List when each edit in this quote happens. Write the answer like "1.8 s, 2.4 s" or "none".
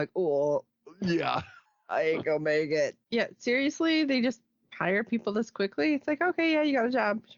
3.0 s